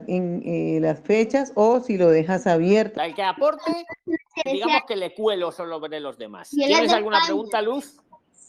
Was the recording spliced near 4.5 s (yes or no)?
yes